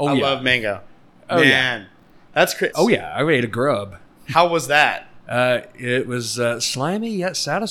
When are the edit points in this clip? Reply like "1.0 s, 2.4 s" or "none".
2.7 s

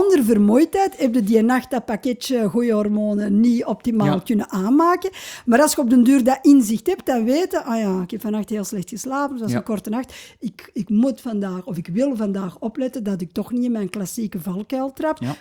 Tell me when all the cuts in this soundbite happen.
10.7 s

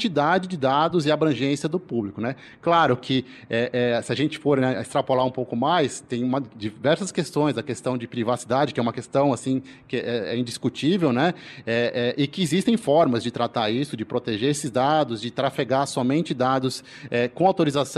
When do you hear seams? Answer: none

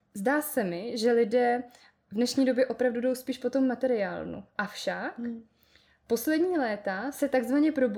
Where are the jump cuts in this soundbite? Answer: none

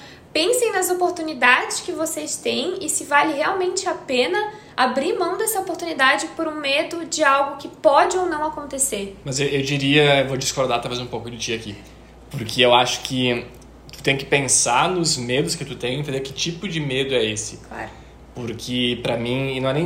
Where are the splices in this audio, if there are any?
none

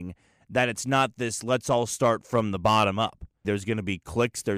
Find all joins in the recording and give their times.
3.4 s

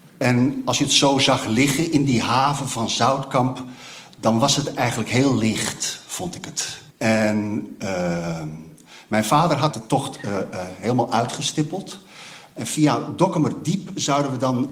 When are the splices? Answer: 6.9 s, 12.5 s

